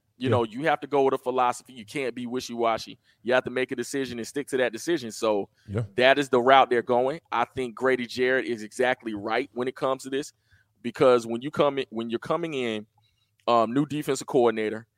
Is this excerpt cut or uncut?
uncut